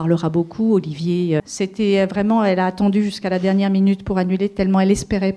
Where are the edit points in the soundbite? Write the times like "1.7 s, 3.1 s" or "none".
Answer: 1.4 s